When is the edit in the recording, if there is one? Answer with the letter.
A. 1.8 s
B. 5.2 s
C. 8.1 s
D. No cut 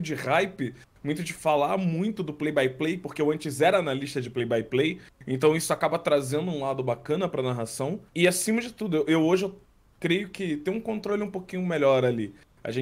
C